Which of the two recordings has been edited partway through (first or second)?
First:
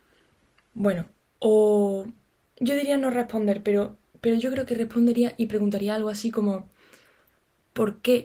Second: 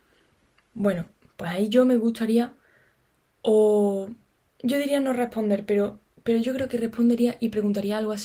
first